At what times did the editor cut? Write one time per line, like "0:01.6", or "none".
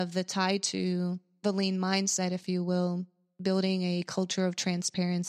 none